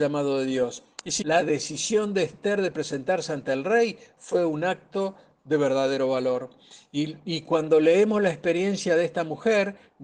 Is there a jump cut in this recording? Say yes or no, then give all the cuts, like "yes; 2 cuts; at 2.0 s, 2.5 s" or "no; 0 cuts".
yes; 1 cut; at 1.2 s